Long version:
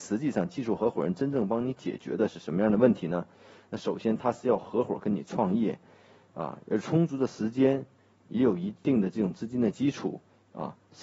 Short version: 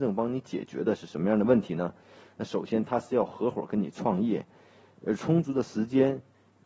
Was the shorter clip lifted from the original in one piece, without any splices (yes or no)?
no